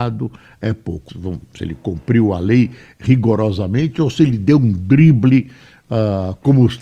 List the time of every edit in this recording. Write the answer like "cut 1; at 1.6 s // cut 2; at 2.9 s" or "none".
cut 1; at 1.1 s